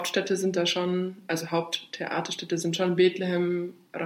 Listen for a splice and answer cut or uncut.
uncut